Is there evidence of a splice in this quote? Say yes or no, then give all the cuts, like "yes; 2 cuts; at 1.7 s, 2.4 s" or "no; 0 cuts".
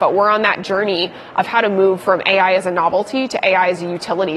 no; 0 cuts